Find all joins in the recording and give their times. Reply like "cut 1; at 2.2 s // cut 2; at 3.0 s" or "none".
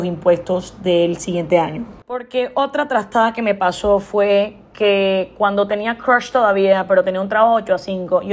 cut 1; at 2.0 s